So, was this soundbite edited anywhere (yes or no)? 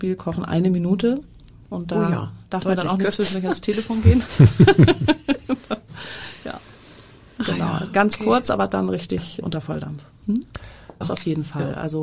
yes